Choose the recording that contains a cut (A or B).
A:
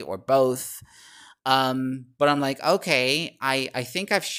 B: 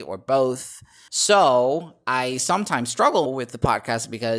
B